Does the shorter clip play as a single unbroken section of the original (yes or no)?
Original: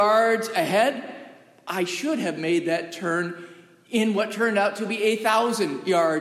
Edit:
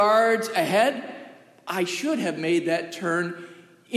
yes